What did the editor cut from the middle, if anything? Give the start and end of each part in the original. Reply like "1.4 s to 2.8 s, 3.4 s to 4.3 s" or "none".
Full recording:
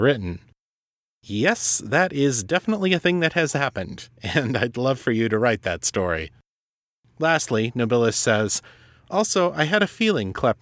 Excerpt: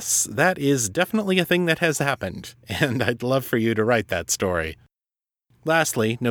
none